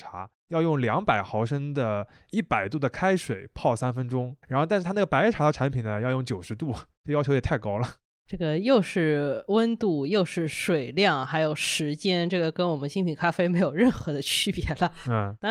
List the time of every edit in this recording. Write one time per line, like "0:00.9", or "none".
0:04.4